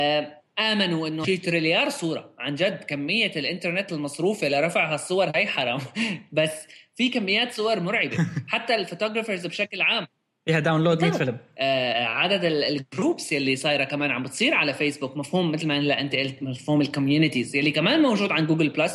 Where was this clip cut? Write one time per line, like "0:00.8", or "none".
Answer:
0:01.2
0:11.9